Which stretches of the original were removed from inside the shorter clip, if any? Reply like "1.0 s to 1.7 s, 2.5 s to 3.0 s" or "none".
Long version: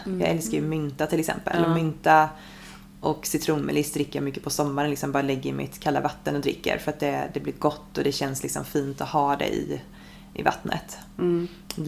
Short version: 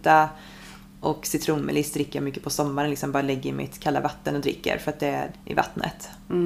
7.3 s to 10.2 s